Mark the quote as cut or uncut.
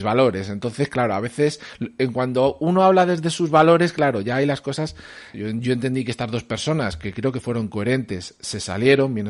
cut